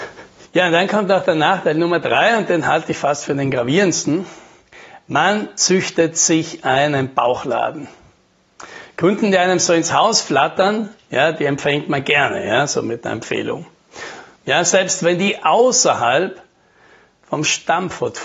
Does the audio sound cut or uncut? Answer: cut